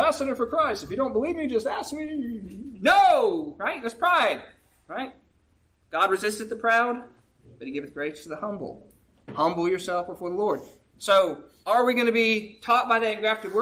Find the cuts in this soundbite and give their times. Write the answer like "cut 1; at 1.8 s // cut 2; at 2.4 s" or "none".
none

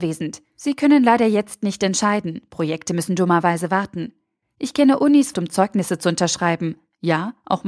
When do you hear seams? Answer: cut 1; at 5.3 s

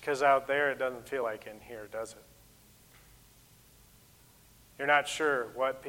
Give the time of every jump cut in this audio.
none

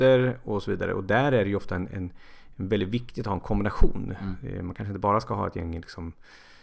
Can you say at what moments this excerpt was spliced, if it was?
none

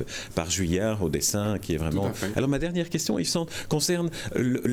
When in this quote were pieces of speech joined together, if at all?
cut 1; at 2.3 s

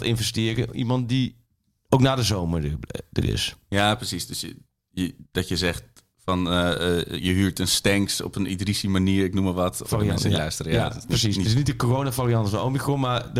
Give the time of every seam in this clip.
cut 1; at 9.8 s

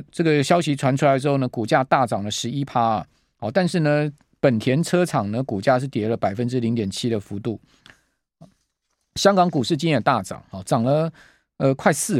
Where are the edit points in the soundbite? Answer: none

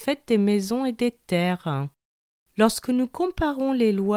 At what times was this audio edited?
none

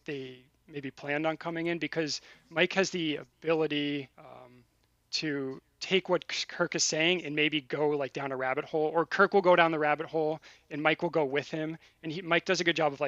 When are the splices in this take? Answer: cut 1; at 4.1 s

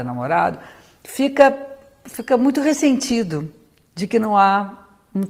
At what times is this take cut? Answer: none

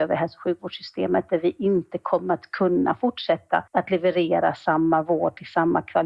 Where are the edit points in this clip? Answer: cut 1; at 3.7 s

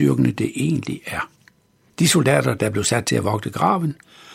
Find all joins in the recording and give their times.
cut 1; at 1.9 s

